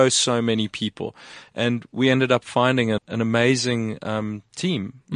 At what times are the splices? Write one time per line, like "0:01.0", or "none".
0:03.0